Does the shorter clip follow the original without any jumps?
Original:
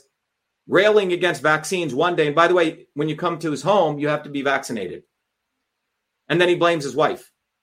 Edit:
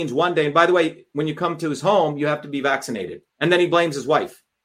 no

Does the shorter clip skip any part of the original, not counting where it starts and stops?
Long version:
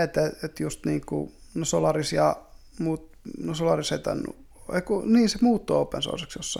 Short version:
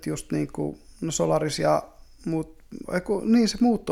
yes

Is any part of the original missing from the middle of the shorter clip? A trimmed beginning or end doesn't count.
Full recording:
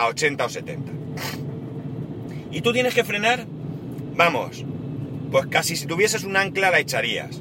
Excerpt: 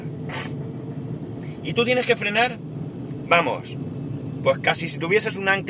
no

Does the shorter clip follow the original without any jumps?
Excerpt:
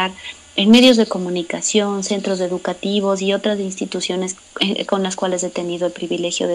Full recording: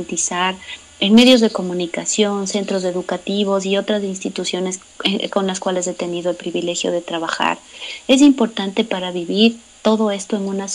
yes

